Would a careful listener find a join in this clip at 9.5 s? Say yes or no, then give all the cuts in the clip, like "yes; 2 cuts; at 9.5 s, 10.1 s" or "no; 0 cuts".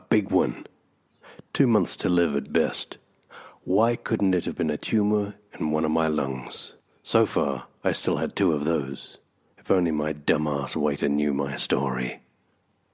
yes; 1 cut; at 9.5 s